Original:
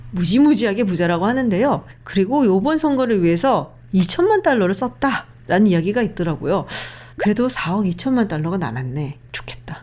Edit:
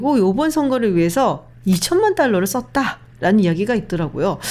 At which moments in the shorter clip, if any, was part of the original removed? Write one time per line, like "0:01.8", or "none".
none